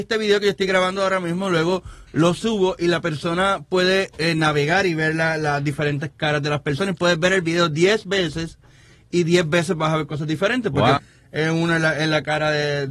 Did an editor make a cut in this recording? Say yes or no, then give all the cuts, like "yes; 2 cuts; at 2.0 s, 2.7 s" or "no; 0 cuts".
yes; 1 cut; at 11.0 s